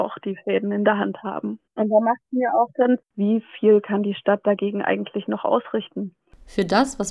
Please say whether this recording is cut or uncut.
cut